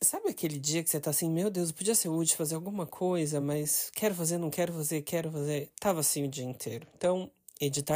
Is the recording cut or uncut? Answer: uncut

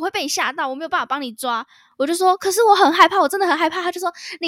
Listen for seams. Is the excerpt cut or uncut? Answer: uncut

